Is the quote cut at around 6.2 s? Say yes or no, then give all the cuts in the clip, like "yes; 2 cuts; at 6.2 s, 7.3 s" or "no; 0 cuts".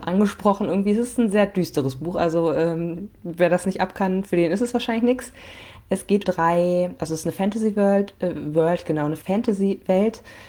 yes; 1 cut; at 6.2 s